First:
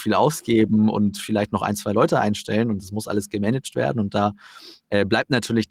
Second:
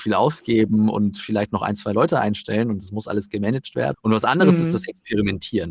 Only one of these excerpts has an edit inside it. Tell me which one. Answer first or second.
second